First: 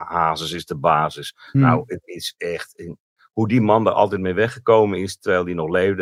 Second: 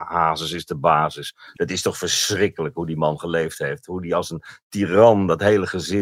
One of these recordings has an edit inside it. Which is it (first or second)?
second